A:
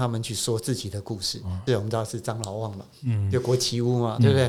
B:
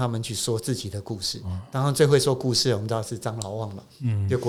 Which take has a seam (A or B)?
A